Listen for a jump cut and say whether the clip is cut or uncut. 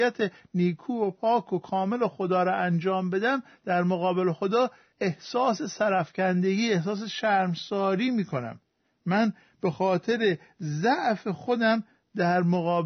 uncut